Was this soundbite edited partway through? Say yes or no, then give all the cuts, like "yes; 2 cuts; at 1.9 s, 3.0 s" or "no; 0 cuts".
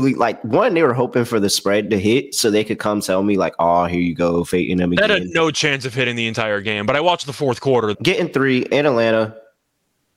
yes; 1 cut; at 7.9 s